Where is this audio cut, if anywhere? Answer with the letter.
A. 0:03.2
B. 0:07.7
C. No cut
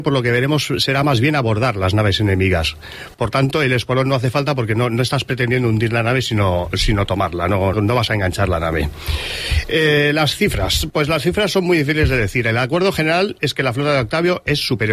B